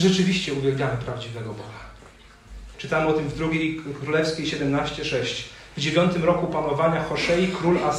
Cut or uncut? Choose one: cut